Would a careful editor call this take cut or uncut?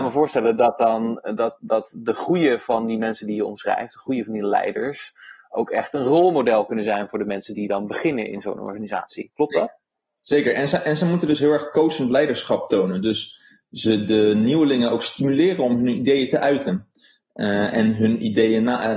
uncut